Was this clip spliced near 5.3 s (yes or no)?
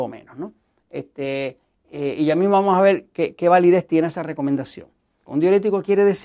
yes